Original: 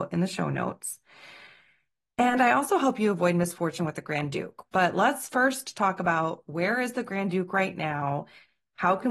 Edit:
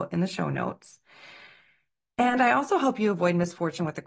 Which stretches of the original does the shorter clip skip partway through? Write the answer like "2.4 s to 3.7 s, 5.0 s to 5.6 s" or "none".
none

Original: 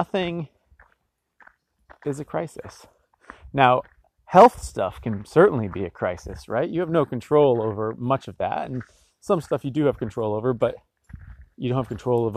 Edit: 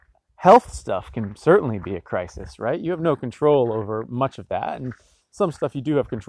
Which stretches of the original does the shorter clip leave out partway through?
none

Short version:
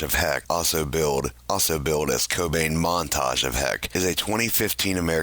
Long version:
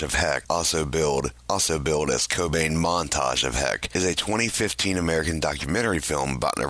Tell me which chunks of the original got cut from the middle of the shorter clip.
none

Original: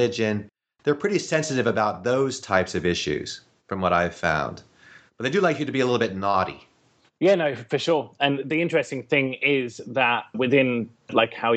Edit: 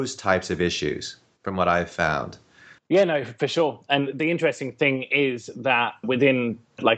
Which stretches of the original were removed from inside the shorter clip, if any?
5.0 s to 7.1 s

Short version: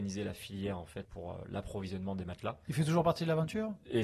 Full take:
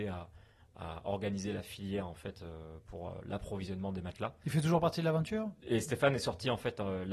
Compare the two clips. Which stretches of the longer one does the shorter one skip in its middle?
2.3 s to 2.8 s

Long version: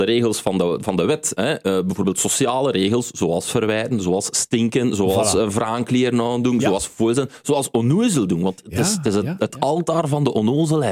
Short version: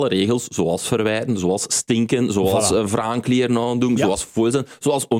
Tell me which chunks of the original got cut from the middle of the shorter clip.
none

